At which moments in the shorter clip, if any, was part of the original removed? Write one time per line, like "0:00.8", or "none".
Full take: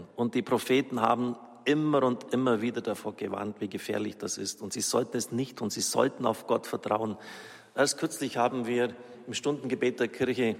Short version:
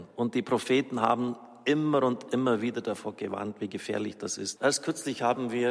0:04.6